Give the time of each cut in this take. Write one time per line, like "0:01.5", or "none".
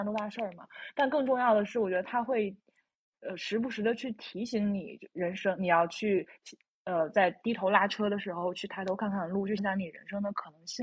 0:09.6